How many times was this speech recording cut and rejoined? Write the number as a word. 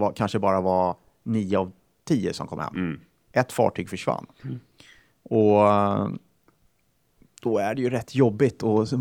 zero